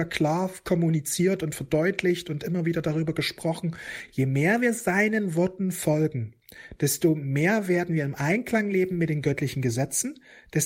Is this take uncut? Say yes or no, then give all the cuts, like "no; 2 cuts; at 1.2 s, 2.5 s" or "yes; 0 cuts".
yes; 0 cuts